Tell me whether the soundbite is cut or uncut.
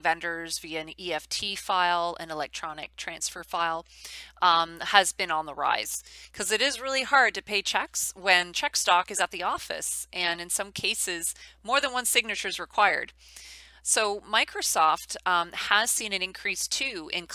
uncut